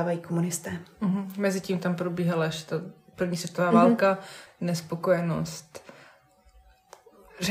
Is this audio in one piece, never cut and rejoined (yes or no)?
no